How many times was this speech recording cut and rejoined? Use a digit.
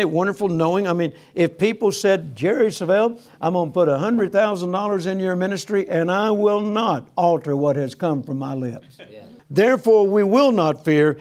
1